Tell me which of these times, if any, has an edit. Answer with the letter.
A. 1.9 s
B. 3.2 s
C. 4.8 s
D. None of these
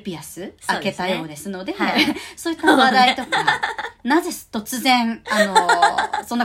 D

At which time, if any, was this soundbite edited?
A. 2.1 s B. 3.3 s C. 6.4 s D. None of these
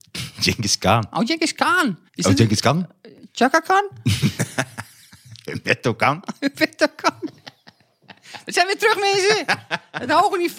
A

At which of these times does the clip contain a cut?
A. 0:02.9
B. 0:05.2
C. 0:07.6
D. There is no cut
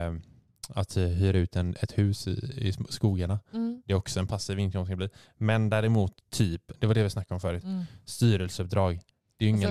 C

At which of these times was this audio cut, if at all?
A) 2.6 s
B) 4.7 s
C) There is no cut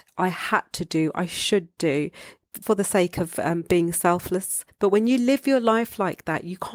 A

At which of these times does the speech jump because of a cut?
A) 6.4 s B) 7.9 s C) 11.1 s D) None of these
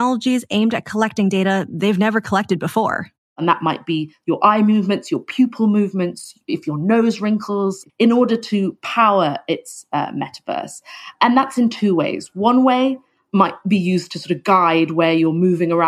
B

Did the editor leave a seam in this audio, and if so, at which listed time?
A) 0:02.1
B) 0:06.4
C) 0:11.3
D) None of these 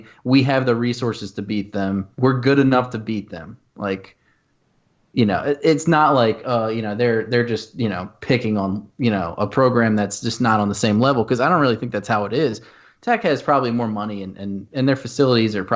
A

